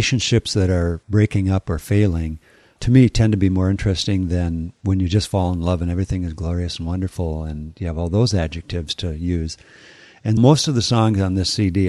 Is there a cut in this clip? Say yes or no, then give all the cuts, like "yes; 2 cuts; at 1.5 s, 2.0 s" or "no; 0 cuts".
yes; 1 cut; at 10.4 s